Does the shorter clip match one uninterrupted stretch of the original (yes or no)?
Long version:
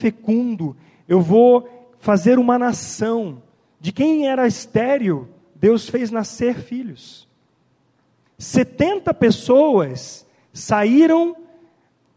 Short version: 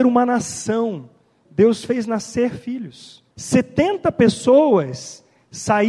no